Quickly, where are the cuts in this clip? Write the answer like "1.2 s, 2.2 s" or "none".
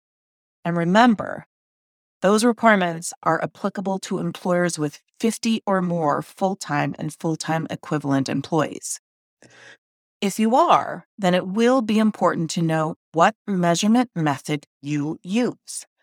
none